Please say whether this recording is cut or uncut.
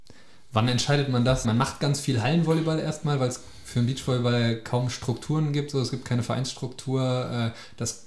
cut